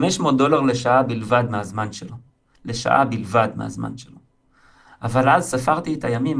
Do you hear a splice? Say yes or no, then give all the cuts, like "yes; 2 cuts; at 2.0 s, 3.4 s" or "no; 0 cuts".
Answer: no; 0 cuts